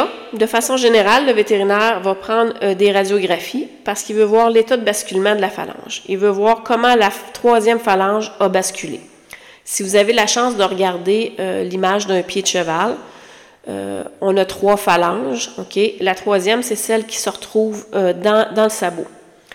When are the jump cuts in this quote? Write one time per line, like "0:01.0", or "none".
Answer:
none